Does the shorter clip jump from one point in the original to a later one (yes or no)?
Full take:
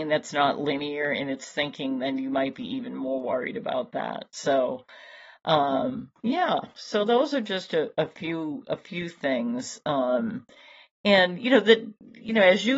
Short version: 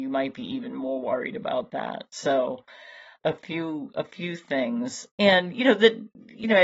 yes